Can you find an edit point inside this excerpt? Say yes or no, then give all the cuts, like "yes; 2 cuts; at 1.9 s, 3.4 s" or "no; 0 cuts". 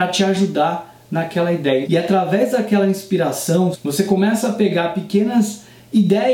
yes; 2 cuts; at 1.8 s, 3.7 s